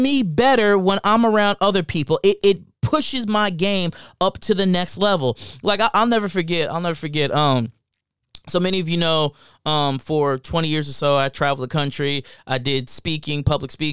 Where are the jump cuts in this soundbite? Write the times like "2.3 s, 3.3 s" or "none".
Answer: none